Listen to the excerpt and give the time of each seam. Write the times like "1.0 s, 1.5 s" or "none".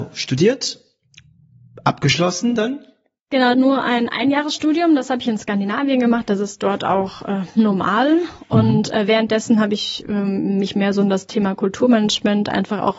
3.5 s